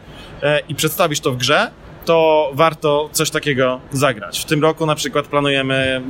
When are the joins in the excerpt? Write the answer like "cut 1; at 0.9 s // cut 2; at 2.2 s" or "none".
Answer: none